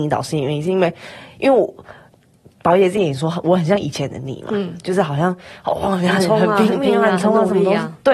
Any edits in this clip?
no; 0 cuts

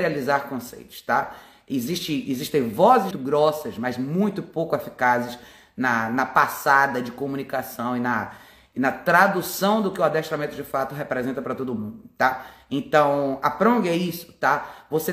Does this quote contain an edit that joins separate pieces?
yes; 1 cut; at 3.1 s

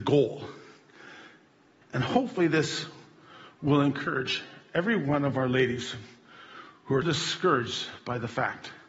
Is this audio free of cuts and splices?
no; 2 cuts; at 1.8 s, 7.0 s

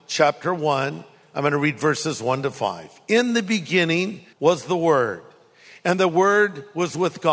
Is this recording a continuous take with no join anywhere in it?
no; 1 cut; at 4.3 s

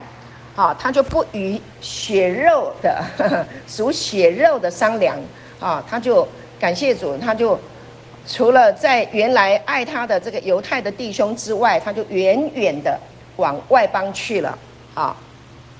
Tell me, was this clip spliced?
no; 0 cuts

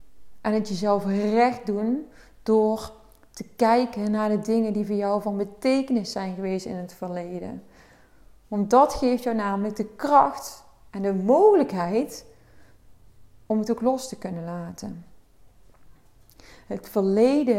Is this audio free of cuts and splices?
yes; 0 cuts

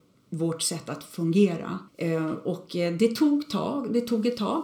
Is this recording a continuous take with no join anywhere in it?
no; 1 cut; at 1.9 s

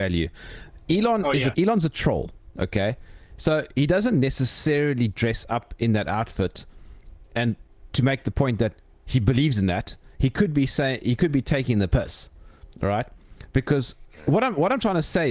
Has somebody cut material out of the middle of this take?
yes; 1 cut; at 1.5 s

